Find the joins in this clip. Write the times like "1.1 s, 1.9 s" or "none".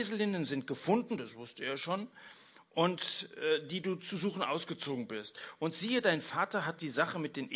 none